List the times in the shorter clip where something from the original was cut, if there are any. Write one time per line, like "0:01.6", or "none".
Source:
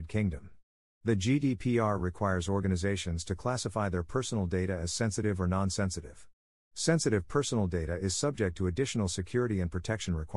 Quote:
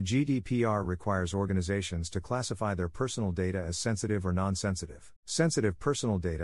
0:05.2